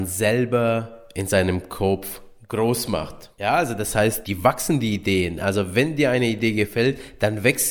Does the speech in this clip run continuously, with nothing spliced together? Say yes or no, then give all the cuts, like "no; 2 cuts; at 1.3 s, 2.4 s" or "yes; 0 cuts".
yes; 0 cuts